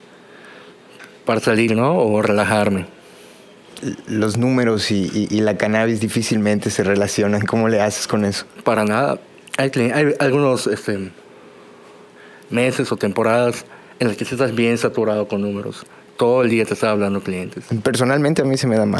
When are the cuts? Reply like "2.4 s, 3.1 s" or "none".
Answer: none